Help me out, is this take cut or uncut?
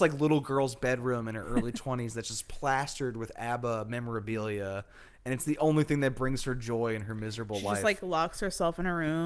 uncut